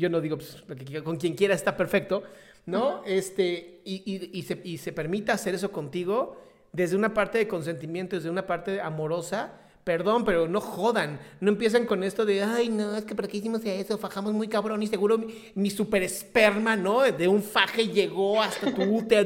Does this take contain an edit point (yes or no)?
no